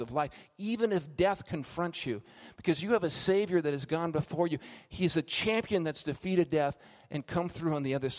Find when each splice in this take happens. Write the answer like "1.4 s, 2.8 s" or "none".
none